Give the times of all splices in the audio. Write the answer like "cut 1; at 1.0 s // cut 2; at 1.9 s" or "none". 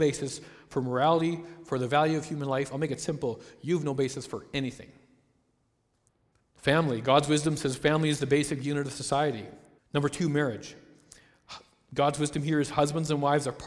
cut 1; at 6.4 s // cut 2; at 9.8 s